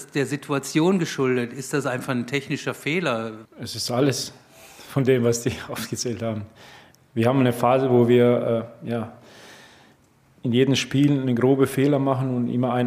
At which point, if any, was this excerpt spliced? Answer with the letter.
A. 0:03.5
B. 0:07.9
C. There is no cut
A